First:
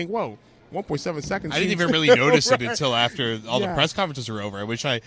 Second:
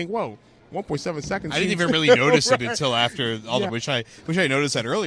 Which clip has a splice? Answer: second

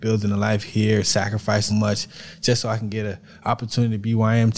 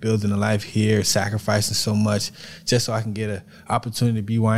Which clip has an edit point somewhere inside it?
first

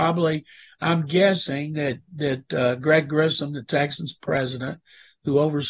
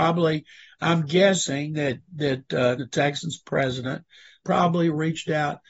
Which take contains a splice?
second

